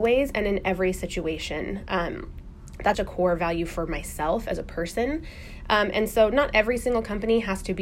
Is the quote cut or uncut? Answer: cut